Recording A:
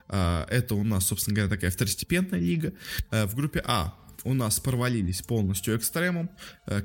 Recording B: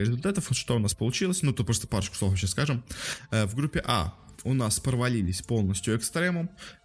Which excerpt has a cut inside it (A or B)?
A